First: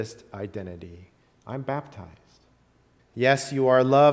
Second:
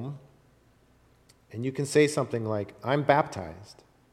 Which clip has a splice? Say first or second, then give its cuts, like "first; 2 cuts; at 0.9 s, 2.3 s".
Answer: first; 1 cut; at 3.0 s